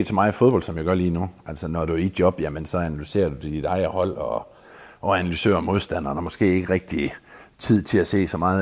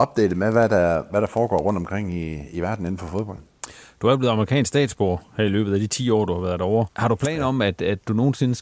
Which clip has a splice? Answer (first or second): second